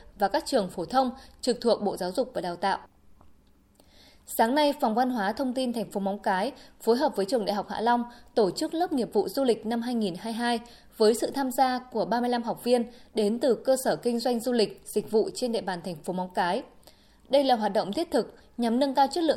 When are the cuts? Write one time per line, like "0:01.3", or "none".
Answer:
none